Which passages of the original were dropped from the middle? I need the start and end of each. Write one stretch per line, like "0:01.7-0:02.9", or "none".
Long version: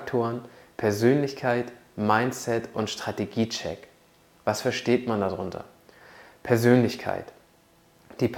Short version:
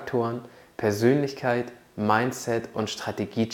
none